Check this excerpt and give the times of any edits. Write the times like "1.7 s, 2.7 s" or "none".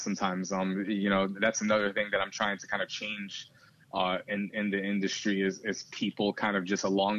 none